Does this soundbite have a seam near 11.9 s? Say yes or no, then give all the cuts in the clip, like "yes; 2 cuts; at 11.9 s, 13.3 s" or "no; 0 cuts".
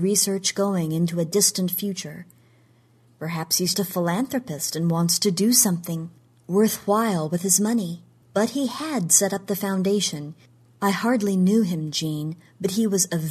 no; 3 cuts; at 3.7 s, 8.2 s, 10.6 s